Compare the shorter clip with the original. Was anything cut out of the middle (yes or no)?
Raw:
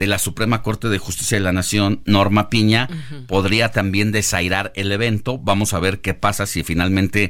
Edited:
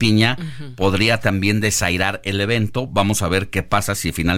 no